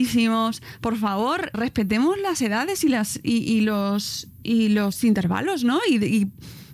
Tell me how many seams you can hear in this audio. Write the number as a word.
one